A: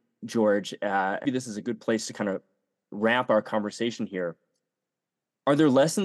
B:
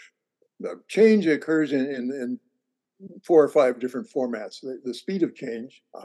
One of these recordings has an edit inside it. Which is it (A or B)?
A